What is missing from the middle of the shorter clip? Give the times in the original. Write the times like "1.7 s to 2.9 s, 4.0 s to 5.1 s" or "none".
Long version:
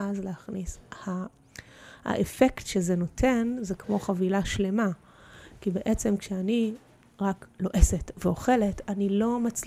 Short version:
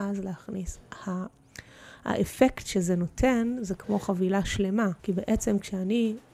5.0 s to 5.6 s